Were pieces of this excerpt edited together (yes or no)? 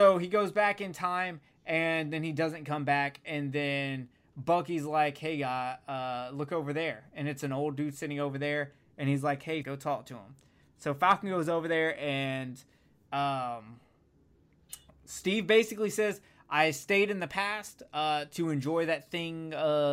yes